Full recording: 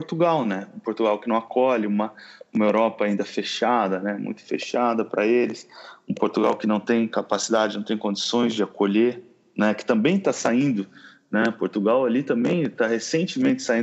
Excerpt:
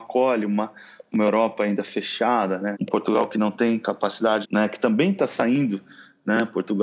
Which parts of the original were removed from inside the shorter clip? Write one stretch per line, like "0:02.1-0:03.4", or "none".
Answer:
0:04.2-0:06.0
0:07.7-0:09.5